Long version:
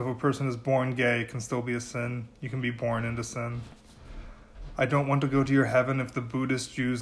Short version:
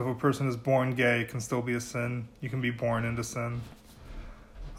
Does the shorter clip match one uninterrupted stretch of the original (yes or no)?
yes